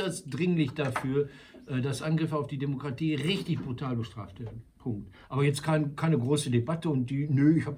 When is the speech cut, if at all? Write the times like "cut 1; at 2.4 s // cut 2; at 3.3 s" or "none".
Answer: none